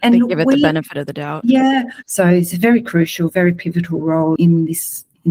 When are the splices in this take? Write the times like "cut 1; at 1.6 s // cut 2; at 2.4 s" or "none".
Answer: cut 1; at 2.0 s // cut 2; at 4.4 s

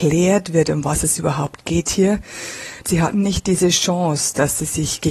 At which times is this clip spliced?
cut 1; at 2.8 s

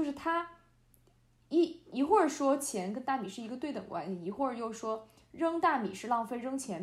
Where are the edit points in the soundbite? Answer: none

